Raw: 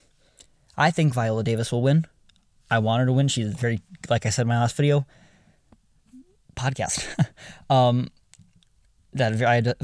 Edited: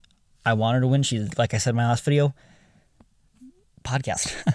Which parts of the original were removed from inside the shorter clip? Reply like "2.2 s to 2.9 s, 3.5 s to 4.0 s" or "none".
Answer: 3.5 s to 4.0 s